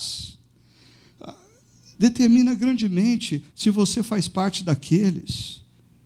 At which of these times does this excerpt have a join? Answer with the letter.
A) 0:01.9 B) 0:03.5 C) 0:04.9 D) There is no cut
B